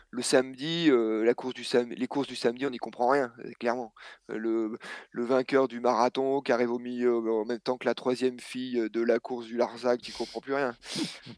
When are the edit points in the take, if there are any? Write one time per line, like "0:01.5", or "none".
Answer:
0:10.0